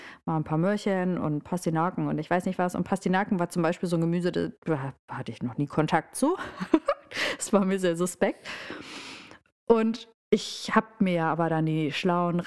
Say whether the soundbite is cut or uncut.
uncut